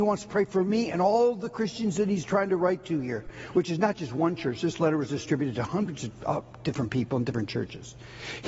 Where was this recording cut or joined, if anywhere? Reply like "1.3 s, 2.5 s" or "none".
none